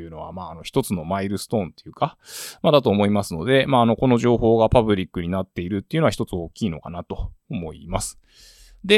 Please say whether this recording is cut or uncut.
uncut